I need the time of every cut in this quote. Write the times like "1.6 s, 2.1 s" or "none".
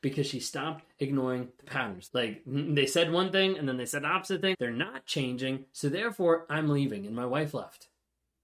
2.1 s, 4.5 s

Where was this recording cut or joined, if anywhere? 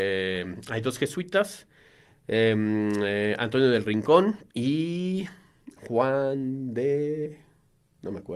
4.5 s

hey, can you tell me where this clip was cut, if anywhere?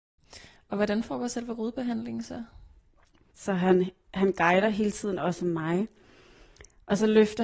3.3 s

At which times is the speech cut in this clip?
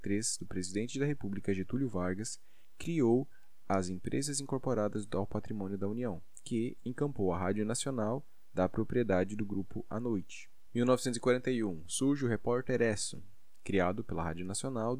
6.8 s

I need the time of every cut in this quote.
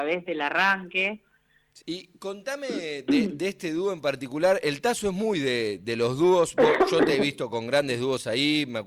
1.8 s

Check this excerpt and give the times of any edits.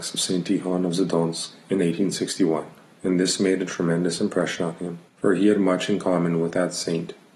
5.1 s

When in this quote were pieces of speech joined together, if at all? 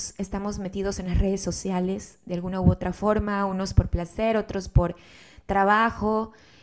none

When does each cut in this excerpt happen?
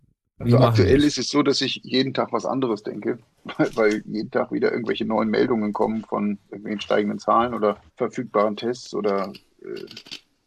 7.9 s

